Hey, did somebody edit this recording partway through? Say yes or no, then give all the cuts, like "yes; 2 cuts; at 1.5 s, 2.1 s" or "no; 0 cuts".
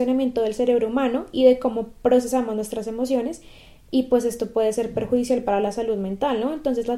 no; 0 cuts